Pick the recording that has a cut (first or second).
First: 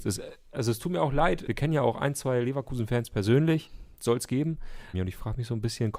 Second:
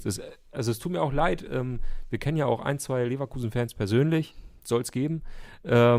first